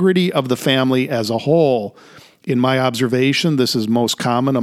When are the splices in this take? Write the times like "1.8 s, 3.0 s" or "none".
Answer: none